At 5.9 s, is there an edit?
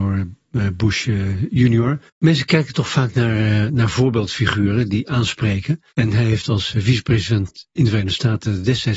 yes; 2 cuts; at 2.1 s, 5.9 s

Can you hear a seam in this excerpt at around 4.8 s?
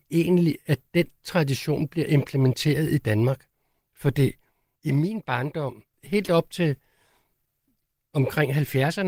yes; 2 cuts; at 4.8 s, 5.9 s

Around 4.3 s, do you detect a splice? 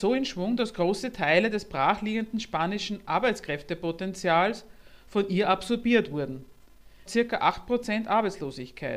no; 1 cut; at 7.1 s

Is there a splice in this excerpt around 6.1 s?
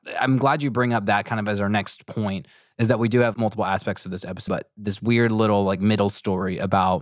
no; 2 cuts; at 3.3 s, 4.5 s

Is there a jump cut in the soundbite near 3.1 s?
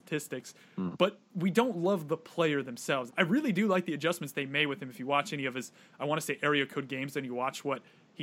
yes; 1 cut; at 3.1 s

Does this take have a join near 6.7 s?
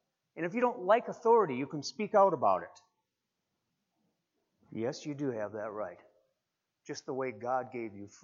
no; 0 cuts

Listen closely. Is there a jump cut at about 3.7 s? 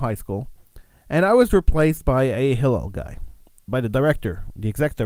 yes; 1 cut; at 3.7 s

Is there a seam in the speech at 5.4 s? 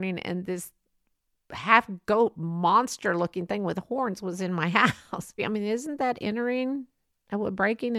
yes; 1 cut; at 5.4 s

